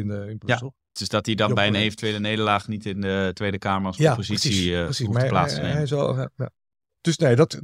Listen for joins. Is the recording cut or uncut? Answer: cut